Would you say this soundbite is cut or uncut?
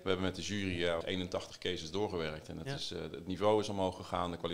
cut